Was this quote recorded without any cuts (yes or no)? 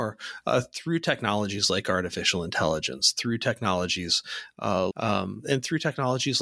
no